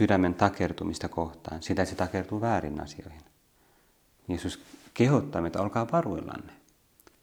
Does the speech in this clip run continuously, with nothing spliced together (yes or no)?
yes